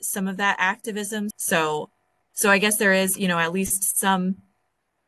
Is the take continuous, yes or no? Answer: no